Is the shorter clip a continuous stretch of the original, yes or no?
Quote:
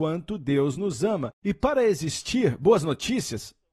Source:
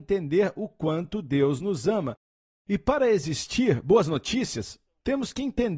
no